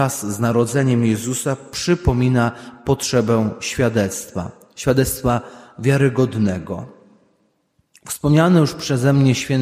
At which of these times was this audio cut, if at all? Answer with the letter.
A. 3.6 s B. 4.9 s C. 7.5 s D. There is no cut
D